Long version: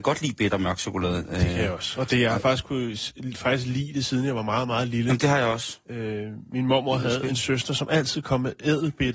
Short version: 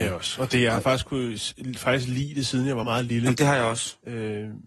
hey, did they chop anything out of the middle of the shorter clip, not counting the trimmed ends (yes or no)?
yes